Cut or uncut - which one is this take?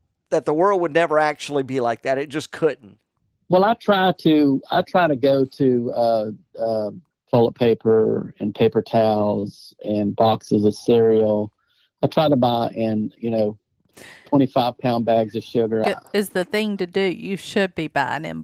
cut